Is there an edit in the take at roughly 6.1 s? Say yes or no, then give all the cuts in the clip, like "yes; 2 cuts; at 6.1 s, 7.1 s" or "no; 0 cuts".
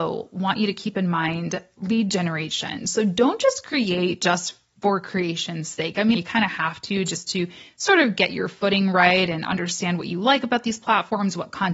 yes; 1 cut; at 6.1 s